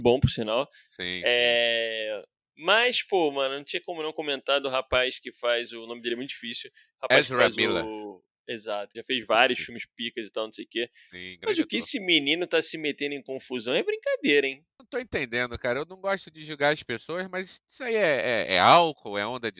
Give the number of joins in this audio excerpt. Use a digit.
1